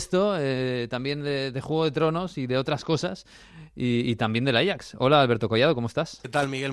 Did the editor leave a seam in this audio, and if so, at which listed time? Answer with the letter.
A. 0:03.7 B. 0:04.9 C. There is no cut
C